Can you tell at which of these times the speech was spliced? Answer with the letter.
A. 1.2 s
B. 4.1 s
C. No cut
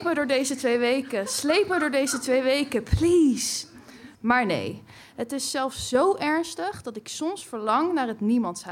B